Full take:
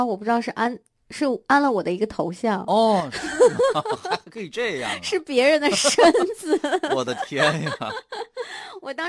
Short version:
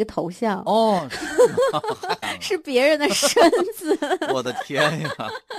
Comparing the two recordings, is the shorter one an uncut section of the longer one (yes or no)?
no